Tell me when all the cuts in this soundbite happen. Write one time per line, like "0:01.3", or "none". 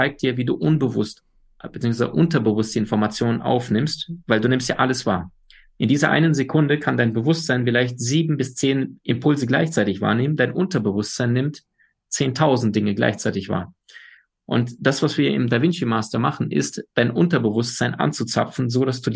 none